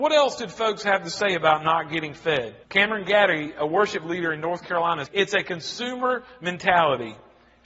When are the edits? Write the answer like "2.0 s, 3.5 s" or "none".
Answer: 2.6 s, 5.1 s